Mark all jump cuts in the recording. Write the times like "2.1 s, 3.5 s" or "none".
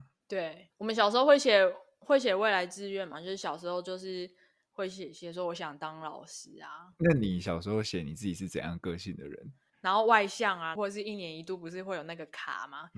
9.7 s, 10.8 s